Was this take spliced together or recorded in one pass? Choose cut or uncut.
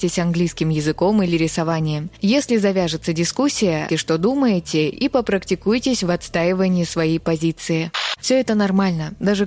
cut